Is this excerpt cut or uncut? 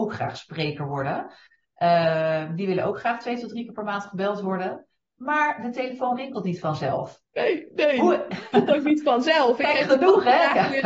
uncut